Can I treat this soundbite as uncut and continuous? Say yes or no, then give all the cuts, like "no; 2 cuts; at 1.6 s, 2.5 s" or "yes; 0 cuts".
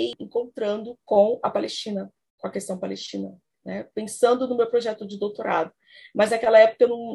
yes; 0 cuts